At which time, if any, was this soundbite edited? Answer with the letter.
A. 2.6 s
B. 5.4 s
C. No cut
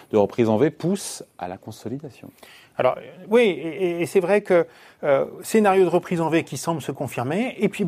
C